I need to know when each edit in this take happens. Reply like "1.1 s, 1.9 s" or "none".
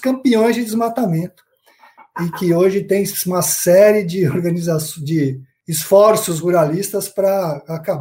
none